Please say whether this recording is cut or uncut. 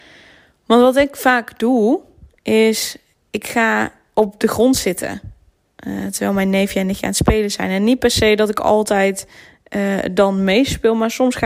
uncut